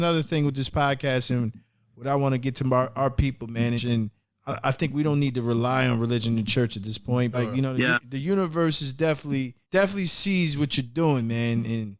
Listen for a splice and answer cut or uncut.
cut